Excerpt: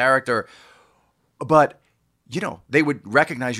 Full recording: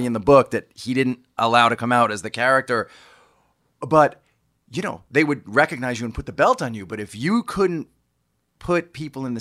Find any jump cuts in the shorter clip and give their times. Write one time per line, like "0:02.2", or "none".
none